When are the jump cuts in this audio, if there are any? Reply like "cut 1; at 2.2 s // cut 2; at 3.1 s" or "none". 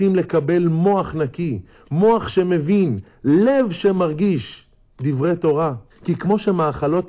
cut 1; at 5.9 s